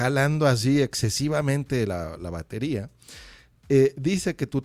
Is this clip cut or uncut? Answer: uncut